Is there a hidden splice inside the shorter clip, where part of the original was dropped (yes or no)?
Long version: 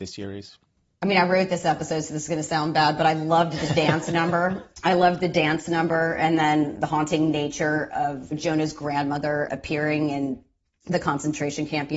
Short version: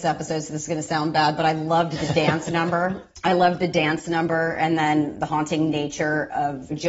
no